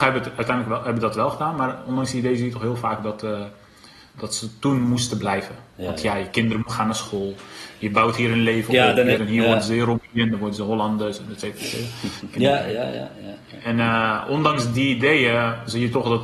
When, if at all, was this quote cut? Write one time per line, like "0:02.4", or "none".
0:04.1
0:09.2
0:12.3